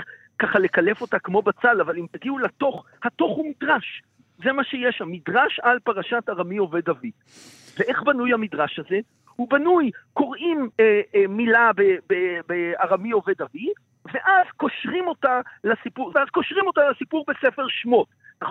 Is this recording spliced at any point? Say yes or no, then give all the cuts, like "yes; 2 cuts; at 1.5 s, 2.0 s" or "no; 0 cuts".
yes; 2 cuts; at 10.7 s, 16.1 s